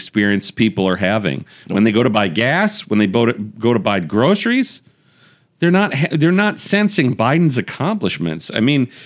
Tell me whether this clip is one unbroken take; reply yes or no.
yes